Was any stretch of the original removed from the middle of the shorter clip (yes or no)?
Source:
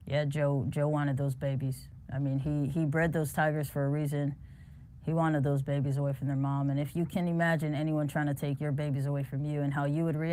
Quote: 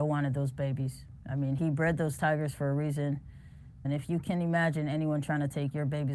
yes